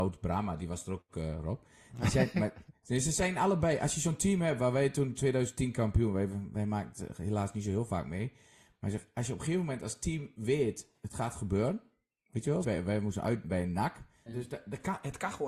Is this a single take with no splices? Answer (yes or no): no